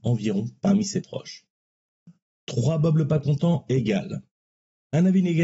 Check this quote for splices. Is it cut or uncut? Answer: uncut